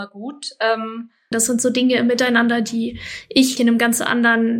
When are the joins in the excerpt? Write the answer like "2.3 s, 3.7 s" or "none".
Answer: 1.3 s, 3.6 s